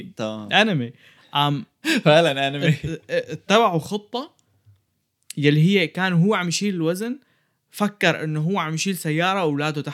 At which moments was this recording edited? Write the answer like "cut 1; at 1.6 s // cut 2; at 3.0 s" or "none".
none

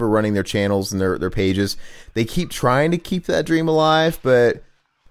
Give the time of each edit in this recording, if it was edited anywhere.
none

